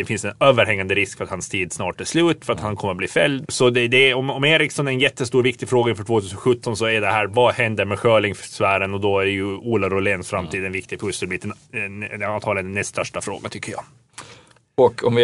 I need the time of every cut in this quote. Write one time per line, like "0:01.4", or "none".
0:03.4